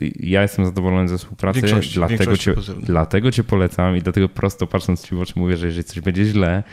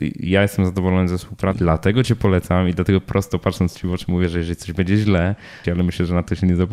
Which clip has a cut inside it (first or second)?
second